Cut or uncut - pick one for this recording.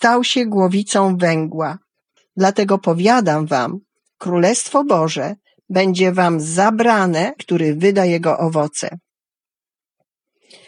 cut